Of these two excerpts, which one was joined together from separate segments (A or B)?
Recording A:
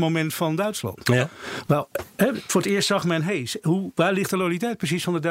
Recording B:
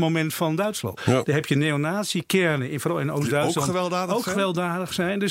B